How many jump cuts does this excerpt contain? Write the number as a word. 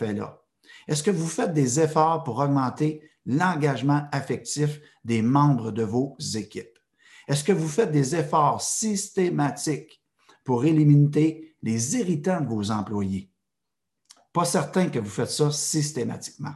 one